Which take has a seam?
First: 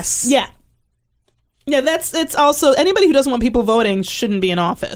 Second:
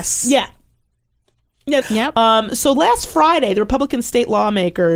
second; 1 cut; at 1.8 s

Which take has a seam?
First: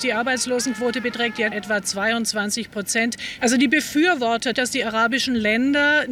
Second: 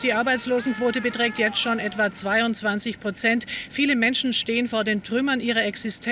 first; 3 cuts; at 1.5 s, 3.4 s, 4.5 s

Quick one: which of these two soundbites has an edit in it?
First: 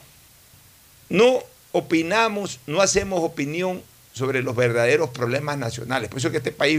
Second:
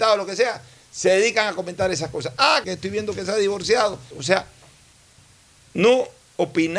second; 2 cuts; at 2.6 s, 4.1 s

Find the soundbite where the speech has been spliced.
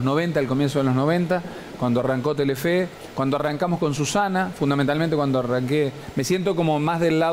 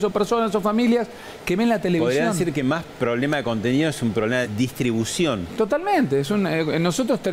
second; 1 cut; at 4.4 s

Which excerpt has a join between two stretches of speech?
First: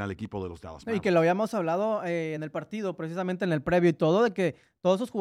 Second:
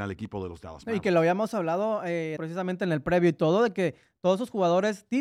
second; 1 cut; at 2.4 s

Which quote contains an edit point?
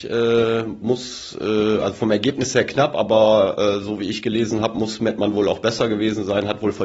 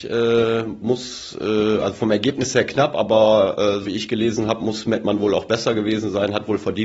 second; 1 cut; at 3.8 s

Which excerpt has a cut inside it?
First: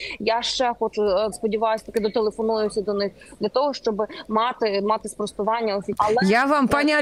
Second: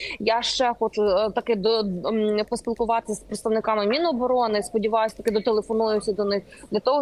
first; 2 cuts; at 1.3 s, 5.9 s

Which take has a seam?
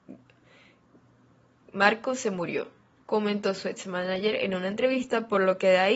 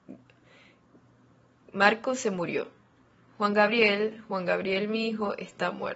first; 1 cut; at 3.0 s

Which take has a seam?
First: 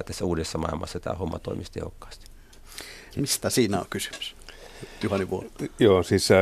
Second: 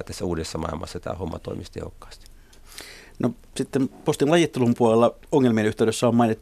first; 1 cut; at 3.1 s

